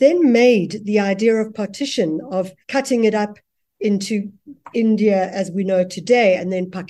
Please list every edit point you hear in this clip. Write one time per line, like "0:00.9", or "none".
0:02.6